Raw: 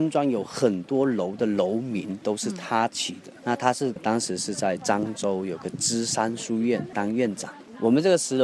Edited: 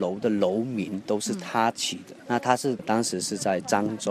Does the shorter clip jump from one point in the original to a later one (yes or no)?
no